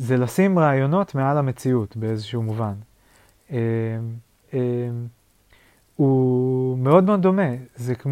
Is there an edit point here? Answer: yes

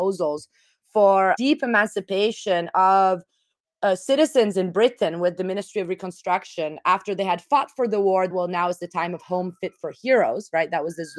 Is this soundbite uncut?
no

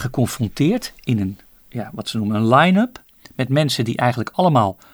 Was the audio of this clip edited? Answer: no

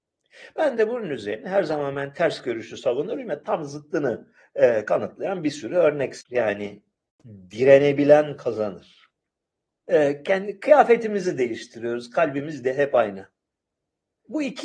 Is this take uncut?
no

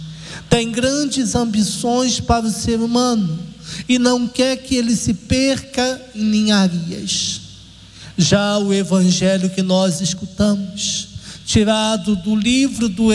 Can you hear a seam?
no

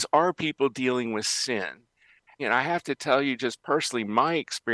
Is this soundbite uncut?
no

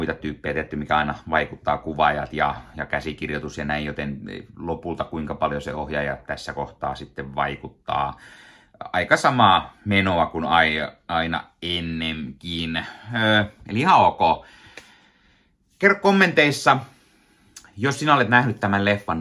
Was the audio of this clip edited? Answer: no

